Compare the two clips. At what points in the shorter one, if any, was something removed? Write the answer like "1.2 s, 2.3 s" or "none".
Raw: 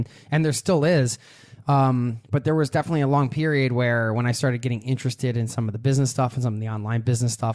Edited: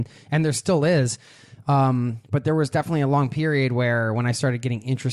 none